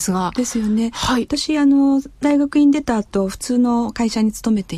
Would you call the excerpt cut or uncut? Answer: uncut